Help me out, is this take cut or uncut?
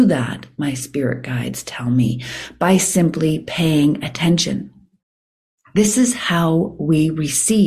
uncut